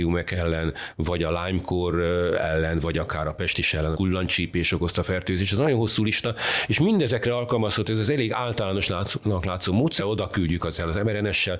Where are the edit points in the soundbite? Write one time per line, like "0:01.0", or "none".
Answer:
0:03.9
0:10.0